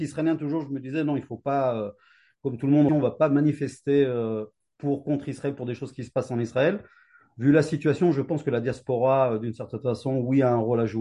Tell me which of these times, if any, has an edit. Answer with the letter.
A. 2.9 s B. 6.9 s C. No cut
A